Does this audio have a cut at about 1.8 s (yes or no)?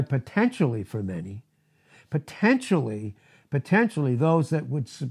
no